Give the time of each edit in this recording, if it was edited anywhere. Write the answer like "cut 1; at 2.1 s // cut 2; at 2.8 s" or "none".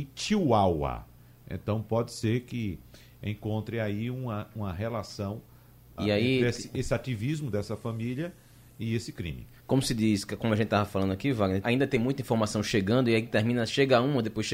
cut 1; at 6.0 s // cut 2; at 11.6 s